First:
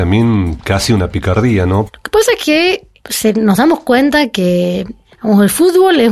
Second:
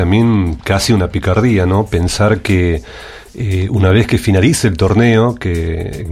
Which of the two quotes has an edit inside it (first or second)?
first